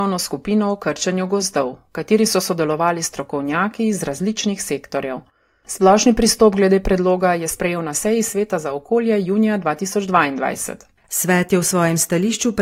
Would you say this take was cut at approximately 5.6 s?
no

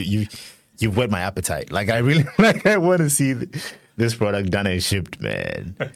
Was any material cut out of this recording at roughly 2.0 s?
no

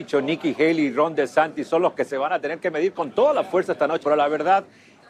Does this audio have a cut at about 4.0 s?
yes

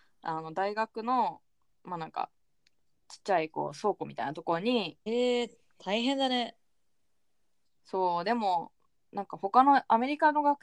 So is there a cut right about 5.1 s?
yes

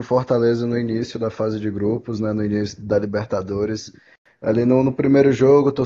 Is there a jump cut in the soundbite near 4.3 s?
no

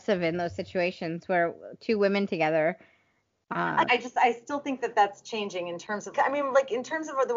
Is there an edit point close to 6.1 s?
yes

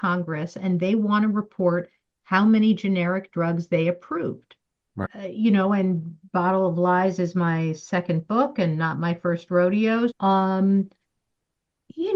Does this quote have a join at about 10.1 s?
yes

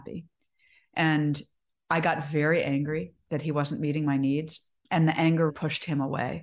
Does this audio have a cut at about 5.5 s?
yes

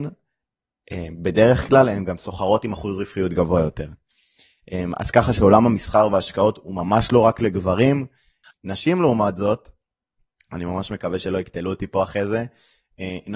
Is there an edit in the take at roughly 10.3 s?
no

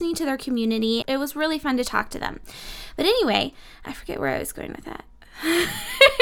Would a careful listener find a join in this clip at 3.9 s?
yes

